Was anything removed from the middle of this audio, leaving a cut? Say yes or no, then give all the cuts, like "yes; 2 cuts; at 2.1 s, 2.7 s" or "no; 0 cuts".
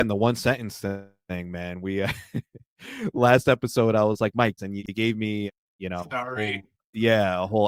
yes; 1 cut; at 4.6 s